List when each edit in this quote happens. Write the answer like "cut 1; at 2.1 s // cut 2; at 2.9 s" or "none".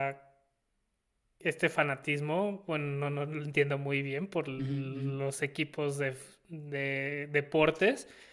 none